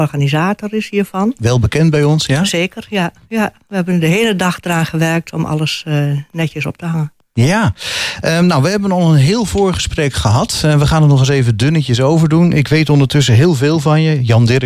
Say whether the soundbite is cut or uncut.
uncut